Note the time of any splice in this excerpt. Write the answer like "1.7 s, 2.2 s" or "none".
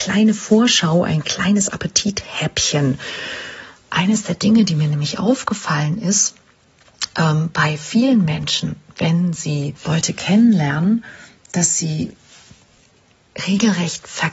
9.8 s